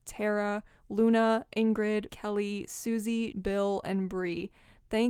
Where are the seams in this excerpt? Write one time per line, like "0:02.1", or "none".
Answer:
0:02.1
0:03.3